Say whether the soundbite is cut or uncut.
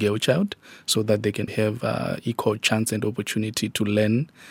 cut